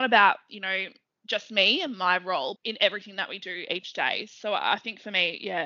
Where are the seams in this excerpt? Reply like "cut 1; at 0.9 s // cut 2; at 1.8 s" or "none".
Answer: cut 1; at 2.6 s